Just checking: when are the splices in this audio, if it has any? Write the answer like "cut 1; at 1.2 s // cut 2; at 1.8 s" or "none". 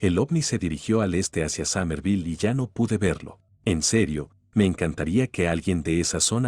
cut 1; at 3.5 s